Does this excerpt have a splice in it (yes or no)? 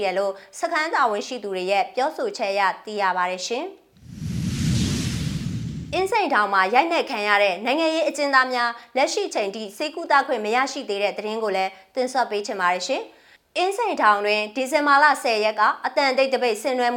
no